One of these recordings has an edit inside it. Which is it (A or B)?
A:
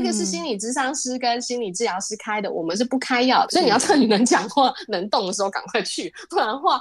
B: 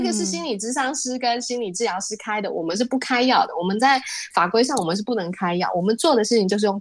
A